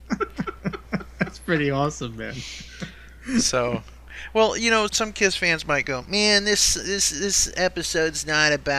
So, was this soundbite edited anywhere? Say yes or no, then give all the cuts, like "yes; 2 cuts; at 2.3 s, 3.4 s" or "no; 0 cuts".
yes; 1 cut; at 4.9 s